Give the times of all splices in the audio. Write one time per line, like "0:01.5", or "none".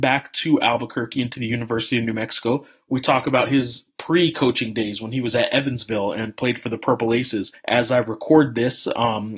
none